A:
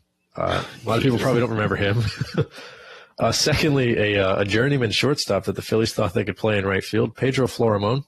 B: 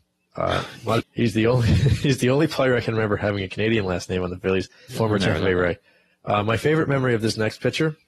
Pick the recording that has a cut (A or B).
B